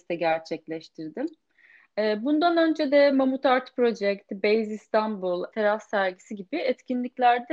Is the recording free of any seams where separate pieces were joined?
no; 1 cut; at 5.5 s

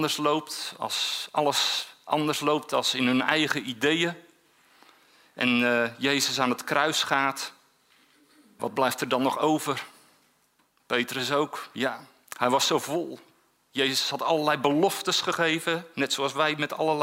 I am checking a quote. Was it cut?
yes; 1 cut; at 8.6 s

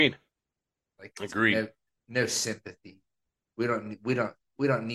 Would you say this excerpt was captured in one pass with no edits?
yes; 0 cuts

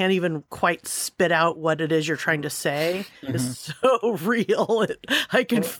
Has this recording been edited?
no; 0 cuts

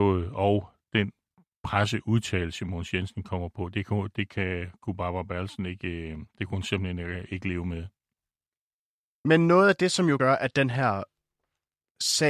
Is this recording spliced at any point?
no; 0 cuts

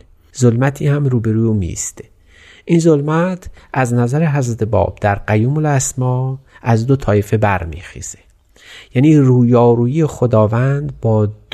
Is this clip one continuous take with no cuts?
yes; 0 cuts

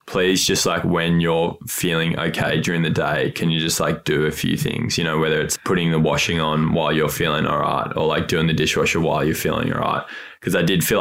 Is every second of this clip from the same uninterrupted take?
yes; 0 cuts

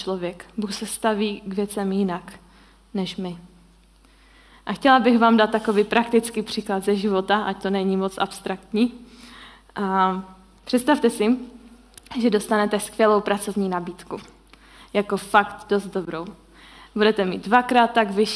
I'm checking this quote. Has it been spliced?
no; 0 cuts

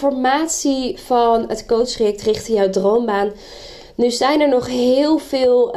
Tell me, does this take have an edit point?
no; 0 cuts

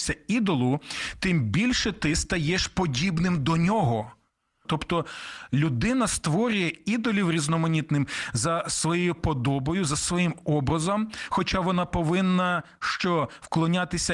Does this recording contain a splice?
yes; 1 cut; at 4.7 s

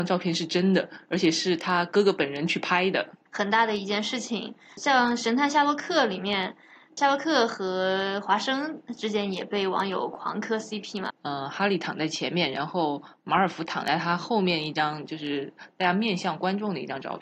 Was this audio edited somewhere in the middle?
yes; 2 cuts; at 3.3 s, 11.1 s

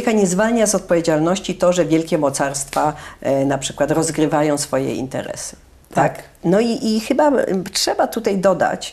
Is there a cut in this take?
yes; 1 cut; at 5.8 s

